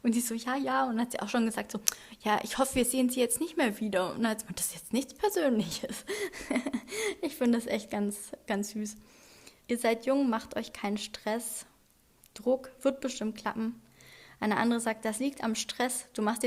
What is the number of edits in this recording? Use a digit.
1